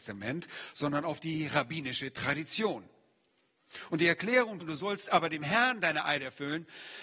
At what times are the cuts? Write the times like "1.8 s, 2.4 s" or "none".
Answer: 4.6 s